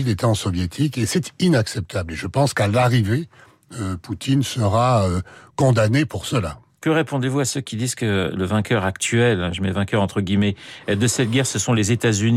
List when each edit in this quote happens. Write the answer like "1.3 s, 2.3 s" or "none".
none